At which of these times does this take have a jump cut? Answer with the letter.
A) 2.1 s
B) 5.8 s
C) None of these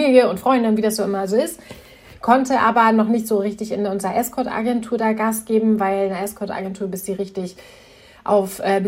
A